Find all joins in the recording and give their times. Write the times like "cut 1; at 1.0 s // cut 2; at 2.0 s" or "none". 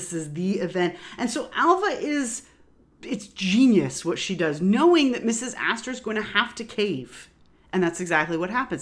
none